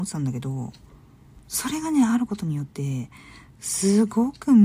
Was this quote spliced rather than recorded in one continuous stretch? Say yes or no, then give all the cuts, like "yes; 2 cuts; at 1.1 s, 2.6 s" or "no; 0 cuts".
yes; 1 cut; at 1.4 s